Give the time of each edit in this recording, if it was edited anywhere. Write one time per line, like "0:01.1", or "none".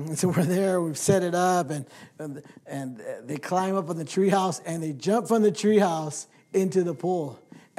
none